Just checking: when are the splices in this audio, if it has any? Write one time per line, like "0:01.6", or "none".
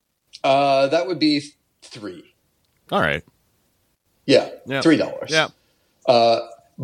none